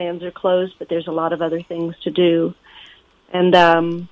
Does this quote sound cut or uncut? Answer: uncut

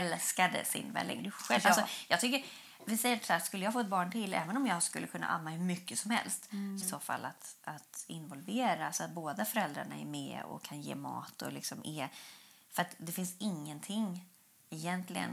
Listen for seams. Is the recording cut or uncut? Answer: cut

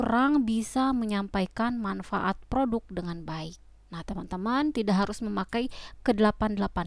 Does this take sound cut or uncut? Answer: cut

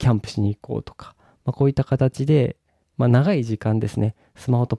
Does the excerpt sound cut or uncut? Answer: uncut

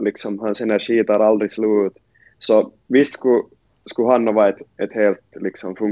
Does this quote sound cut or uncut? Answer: uncut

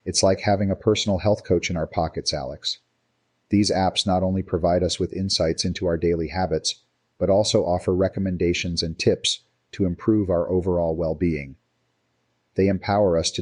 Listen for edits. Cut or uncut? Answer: uncut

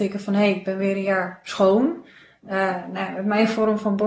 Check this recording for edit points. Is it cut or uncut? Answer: uncut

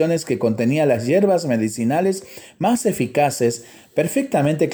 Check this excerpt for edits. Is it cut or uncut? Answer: uncut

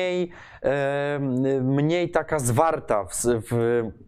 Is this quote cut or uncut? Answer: uncut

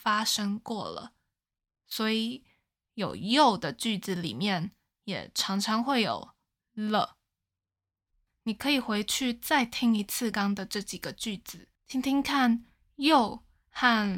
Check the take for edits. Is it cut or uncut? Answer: cut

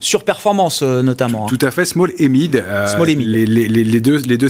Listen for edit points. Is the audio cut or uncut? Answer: uncut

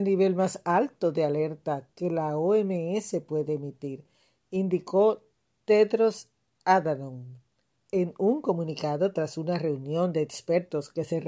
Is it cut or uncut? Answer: cut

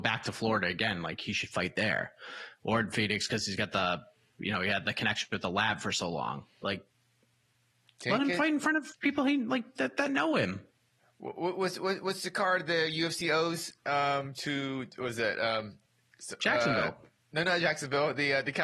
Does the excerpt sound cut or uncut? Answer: uncut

